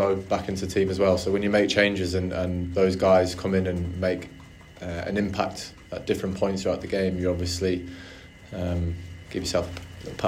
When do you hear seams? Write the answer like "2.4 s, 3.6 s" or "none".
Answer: none